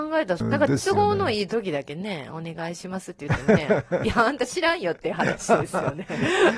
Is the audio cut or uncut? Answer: uncut